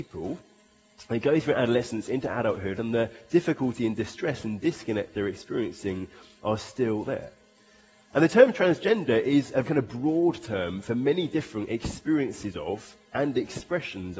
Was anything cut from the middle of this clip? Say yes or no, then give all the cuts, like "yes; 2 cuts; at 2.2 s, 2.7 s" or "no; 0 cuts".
yes; 2 cuts; at 2.8 s, 9.6 s